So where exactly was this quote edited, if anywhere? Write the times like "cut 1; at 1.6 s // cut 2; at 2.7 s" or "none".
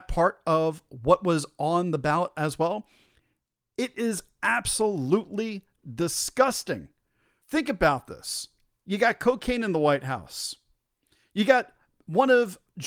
cut 1; at 7.4 s